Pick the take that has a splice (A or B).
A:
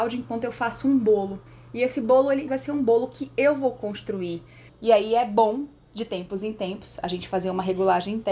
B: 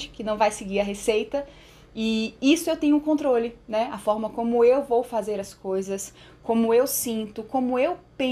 A